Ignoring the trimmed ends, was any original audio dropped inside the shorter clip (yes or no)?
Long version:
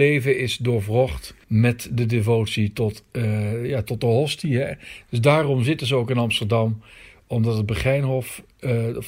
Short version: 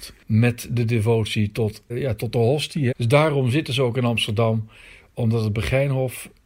yes